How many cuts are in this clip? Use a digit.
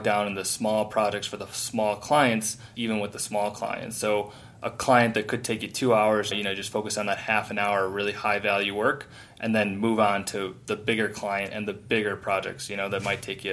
2